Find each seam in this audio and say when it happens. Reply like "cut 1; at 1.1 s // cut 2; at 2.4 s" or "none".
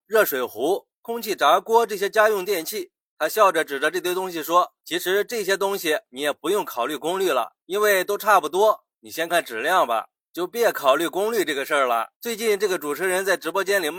cut 1; at 9.3 s // cut 2; at 12.1 s